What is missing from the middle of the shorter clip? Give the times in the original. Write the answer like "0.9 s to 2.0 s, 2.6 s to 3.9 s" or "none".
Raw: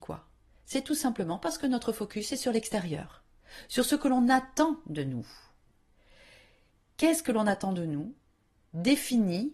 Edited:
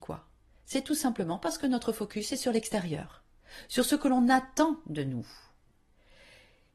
none